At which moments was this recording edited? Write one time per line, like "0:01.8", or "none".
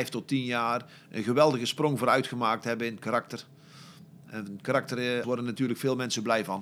0:05.2